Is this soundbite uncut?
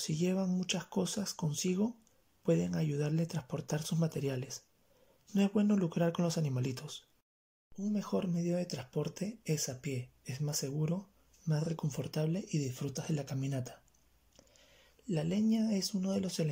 yes; 0 cuts

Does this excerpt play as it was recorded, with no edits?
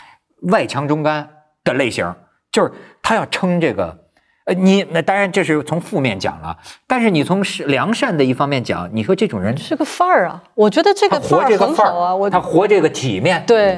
yes; 0 cuts

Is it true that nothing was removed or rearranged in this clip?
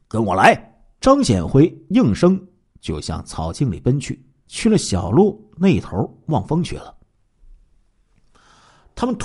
no; 2 cuts; at 1.0 s, 4.5 s

